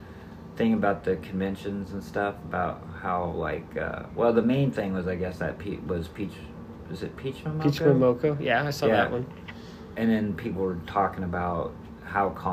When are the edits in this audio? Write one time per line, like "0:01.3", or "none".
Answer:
none